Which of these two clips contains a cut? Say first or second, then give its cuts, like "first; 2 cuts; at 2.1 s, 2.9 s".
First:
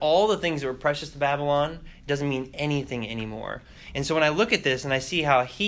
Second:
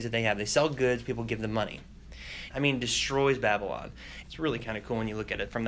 second; 2 cuts; at 2.5 s, 4.2 s